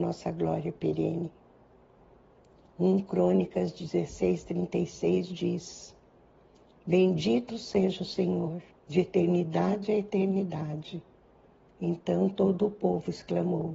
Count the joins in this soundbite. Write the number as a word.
one